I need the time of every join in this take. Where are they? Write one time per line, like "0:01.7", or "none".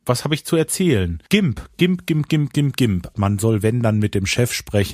0:01.3
0:03.1